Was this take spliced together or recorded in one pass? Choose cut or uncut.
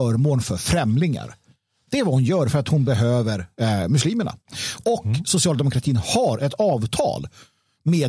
uncut